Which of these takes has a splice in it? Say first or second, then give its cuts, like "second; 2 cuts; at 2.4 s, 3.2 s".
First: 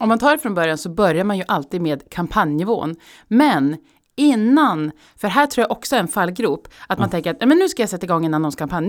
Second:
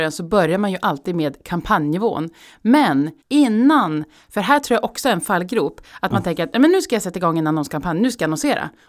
second; 1 cut; at 3.2 s